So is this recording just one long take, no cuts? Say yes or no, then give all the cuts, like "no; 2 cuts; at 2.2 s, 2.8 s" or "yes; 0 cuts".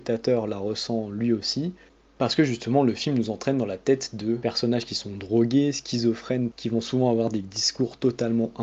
no; 1 cut; at 6.5 s